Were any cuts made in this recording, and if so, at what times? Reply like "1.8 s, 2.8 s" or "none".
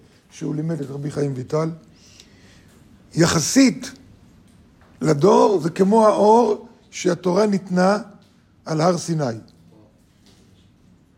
none

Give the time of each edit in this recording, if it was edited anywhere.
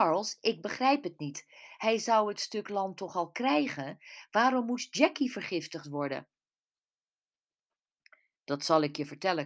1.8 s

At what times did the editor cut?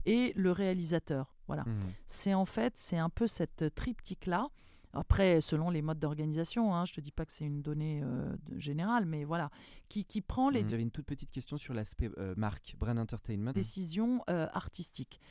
10.7 s, 13.5 s

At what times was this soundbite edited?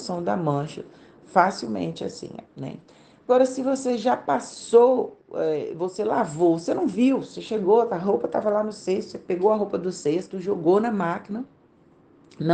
2.5 s

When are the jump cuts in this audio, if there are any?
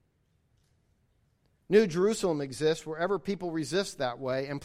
none

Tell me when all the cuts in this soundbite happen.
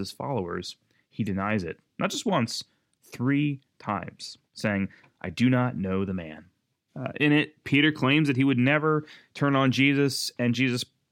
4.5 s, 6.9 s

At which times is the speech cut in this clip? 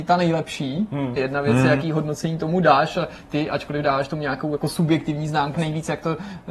1.2 s, 5.5 s

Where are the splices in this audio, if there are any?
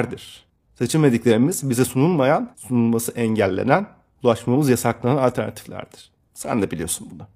2.5 s, 6.3 s

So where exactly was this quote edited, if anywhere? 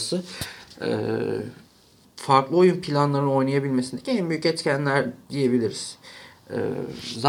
2.1 s, 5.2 s

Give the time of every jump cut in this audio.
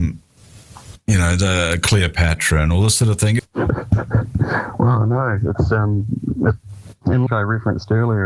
3.4 s, 7.3 s

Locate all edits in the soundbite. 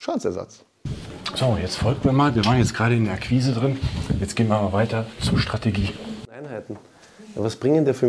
none

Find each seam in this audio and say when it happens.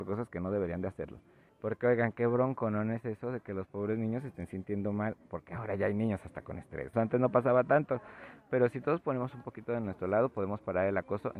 1.5 s, 6.9 s

